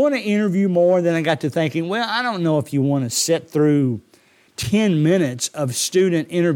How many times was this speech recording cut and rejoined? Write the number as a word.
one